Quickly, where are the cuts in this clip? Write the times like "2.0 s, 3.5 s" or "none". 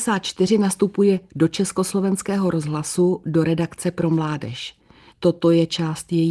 5.1 s